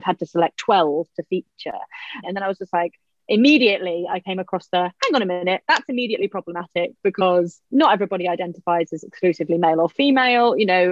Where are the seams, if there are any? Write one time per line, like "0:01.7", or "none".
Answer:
0:02.2
0:07.6